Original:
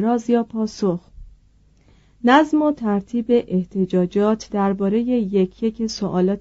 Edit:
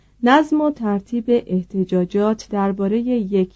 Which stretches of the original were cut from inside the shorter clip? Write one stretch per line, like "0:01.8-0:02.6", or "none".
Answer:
none